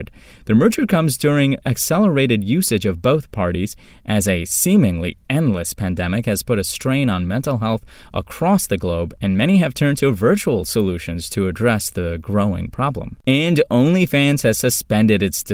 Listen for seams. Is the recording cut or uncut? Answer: cut